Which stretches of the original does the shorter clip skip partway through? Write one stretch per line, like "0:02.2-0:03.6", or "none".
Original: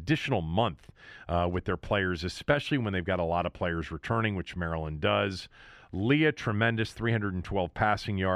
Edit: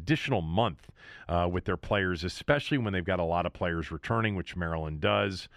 none

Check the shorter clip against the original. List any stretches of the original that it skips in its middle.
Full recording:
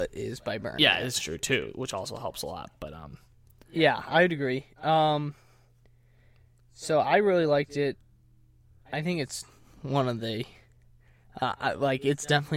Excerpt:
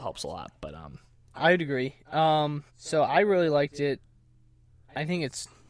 0:03.5-0:04.0
0:05.4-0:06.6

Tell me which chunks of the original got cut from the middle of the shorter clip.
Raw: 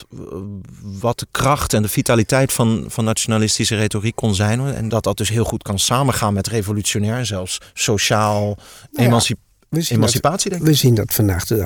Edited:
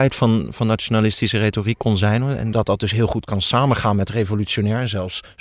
none

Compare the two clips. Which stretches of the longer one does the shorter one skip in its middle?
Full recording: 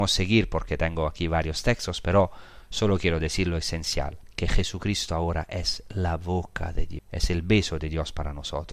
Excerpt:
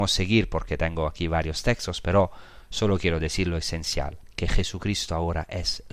none

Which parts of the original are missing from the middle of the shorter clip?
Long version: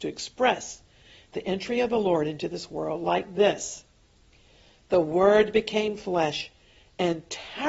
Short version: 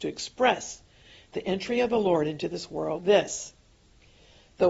0:03.0-0:03.3

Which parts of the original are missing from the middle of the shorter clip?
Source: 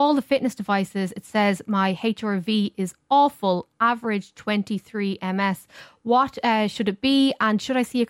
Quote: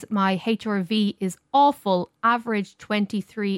none

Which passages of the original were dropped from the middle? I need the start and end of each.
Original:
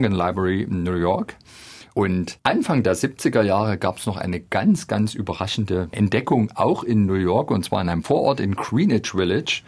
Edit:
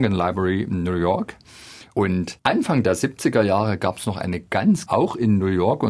0:04.9-0:06.5

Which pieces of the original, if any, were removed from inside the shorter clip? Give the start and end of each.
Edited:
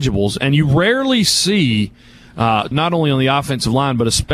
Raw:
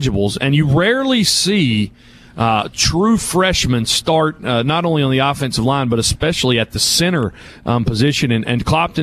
0:02.7-0:04.6

